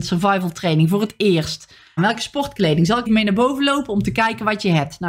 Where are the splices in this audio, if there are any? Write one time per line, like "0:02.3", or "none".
0:02.0
0:03.1